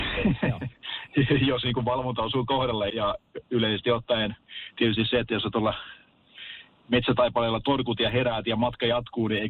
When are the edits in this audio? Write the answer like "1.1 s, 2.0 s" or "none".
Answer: 2.9 s